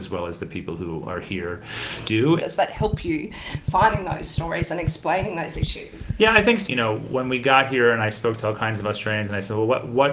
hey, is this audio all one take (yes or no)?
no